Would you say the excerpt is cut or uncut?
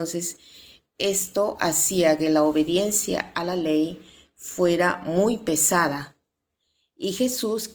uncut